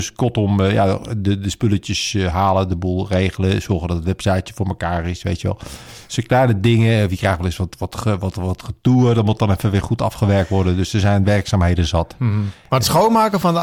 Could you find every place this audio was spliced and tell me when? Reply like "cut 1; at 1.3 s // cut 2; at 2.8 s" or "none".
none